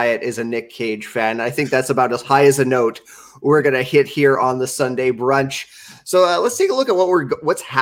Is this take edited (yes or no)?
no